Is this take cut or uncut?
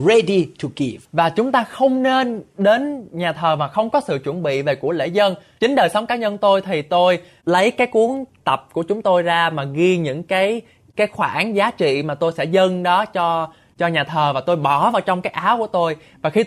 cut